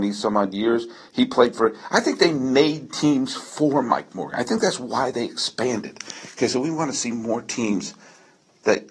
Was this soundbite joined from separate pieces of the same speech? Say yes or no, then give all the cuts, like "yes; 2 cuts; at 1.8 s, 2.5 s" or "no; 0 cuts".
no; 0 cuts